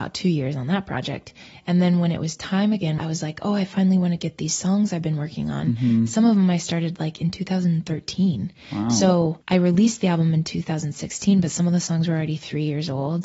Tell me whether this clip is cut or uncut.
cut